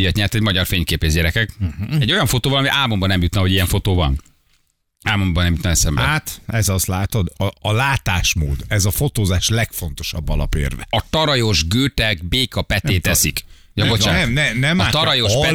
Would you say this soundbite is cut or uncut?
uncut